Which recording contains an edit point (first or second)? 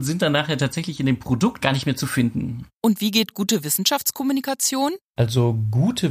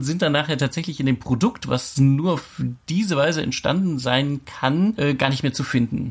first